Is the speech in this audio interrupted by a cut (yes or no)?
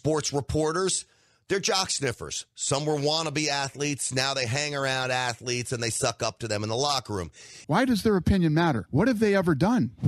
yes